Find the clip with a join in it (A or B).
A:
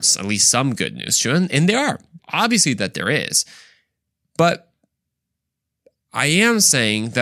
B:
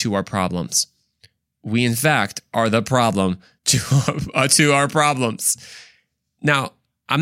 A